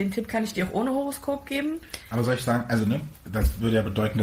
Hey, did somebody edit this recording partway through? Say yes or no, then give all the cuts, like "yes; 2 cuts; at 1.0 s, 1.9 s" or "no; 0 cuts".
no; 0 cuts